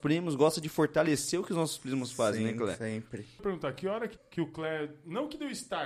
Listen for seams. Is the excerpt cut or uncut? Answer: cut